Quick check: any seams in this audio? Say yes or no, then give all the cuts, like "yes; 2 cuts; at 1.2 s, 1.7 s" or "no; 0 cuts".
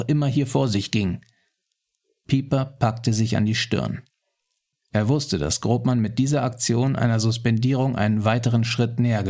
no; 0 cuts